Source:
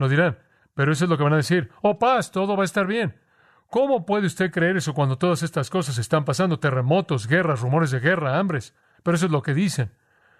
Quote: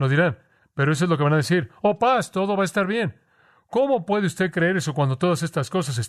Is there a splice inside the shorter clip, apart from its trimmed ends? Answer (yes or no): no